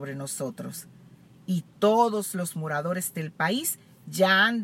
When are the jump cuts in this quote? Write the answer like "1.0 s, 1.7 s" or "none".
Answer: none